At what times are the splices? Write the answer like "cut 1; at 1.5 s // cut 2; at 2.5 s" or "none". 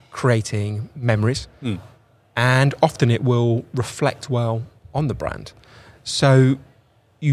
none